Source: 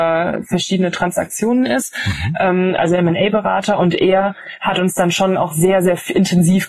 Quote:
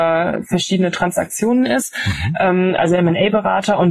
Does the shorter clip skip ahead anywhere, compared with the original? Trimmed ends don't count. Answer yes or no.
no